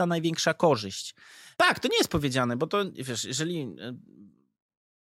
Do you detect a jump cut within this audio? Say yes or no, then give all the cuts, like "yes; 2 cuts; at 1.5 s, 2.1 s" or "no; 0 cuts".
yes; 1 cut; at 1.6 s